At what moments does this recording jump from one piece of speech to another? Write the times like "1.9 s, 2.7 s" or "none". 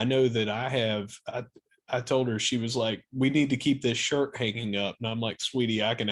none